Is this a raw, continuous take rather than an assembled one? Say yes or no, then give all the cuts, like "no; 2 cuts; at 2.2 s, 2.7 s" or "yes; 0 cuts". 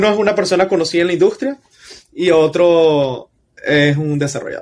yes; 0 cuts